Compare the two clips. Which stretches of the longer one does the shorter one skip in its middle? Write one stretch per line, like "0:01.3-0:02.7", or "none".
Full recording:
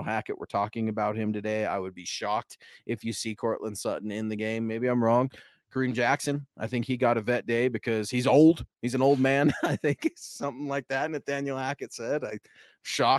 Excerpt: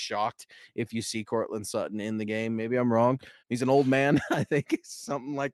0:05.5-0:08.7